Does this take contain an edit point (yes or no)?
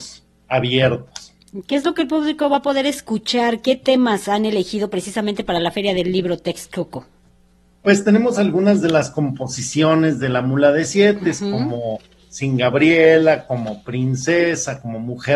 yes